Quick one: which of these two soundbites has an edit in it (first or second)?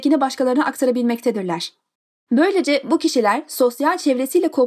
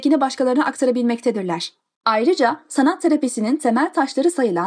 second